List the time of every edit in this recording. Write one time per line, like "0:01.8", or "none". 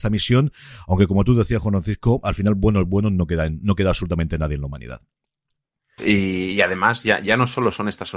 0:06.0